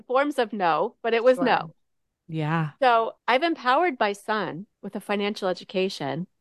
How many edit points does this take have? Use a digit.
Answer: 2